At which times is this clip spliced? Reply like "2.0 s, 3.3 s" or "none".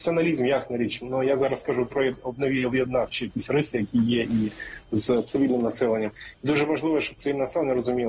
none